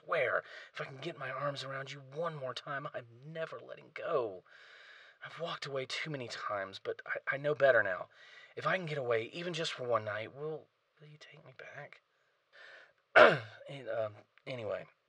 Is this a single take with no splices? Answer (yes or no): no